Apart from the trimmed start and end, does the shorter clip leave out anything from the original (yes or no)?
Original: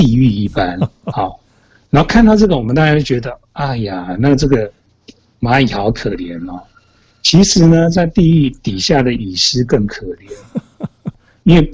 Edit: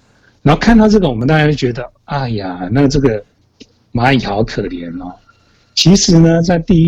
no